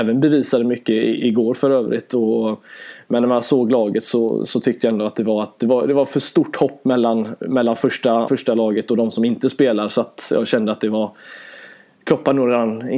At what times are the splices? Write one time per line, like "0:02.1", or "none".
0:08.3